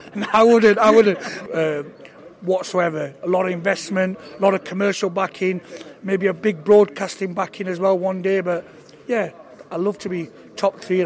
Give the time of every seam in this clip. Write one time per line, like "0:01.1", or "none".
0:01.5